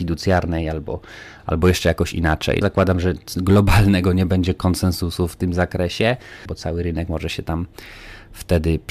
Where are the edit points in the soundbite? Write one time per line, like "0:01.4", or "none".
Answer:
0:02.6
0:06.5